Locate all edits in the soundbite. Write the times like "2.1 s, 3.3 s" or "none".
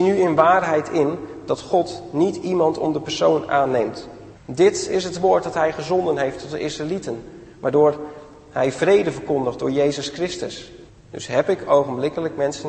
4.3 s, 10.9 s